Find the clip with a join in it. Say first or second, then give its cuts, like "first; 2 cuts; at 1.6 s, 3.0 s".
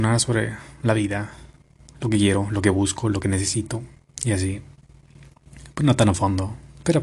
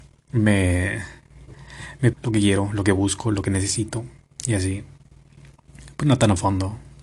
second; 1 cut; at 2.1 s